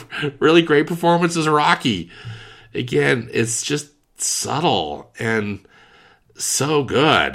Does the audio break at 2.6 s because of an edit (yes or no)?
no